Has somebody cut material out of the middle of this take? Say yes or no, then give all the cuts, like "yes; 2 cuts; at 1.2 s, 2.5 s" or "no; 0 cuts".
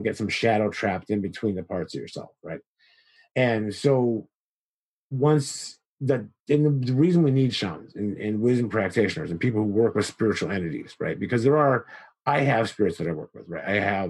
yes; 1 cut; at 3.3 s